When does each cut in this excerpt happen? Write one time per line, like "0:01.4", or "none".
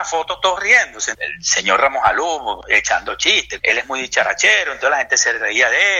0:01.1
0:03.6